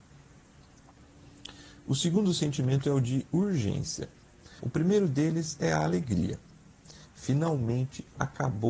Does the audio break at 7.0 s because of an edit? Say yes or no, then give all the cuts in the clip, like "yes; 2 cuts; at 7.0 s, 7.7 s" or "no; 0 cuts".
yes; 2 cuts; at 4.6 s, 7.0 s